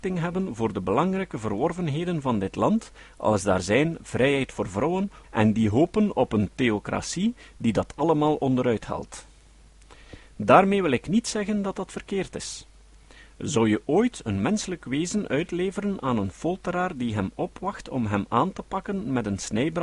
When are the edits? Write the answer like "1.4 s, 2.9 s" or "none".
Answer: 5.2 s